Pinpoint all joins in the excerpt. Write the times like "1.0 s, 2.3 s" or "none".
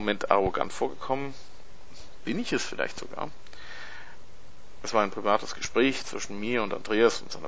4.8 s

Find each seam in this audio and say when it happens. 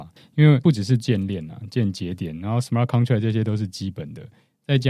none

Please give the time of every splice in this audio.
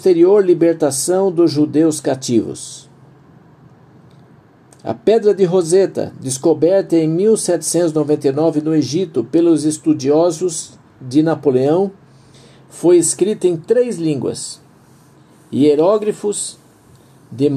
none

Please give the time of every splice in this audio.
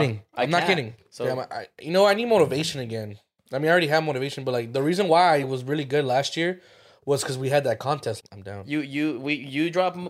1.0 s, 8.2 s

